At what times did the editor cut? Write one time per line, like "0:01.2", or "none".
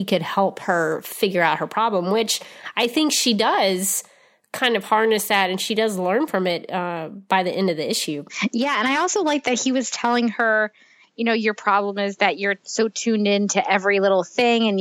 none